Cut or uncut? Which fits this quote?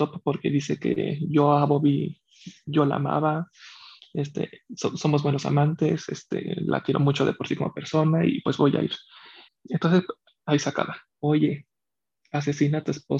cut